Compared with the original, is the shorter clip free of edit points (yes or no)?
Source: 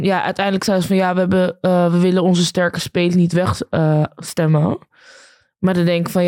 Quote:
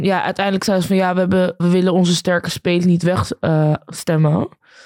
no